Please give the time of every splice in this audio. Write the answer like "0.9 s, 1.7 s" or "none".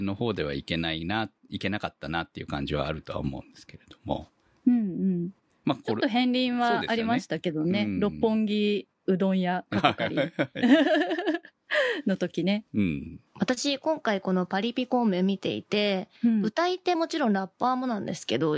13.3 s, 16.9 s